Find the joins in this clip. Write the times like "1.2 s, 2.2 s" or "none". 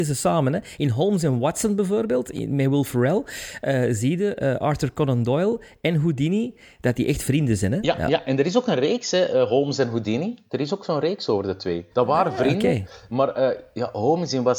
11.9 s